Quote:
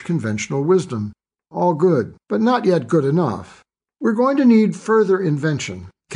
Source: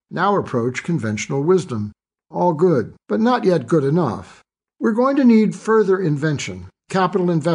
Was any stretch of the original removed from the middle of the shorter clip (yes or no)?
no